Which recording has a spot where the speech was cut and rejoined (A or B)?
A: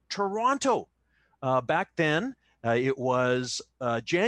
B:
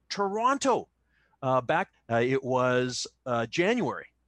B